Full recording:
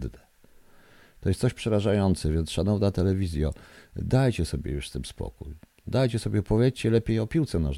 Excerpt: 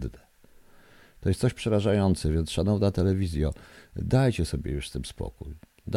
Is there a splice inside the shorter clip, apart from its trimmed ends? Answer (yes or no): no